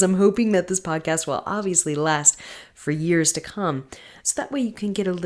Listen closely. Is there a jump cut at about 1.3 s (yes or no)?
no